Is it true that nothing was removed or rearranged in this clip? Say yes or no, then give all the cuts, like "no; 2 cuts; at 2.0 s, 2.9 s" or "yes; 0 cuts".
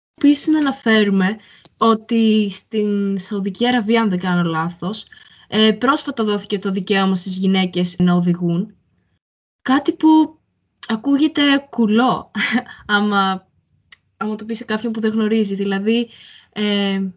yes; 0 cuts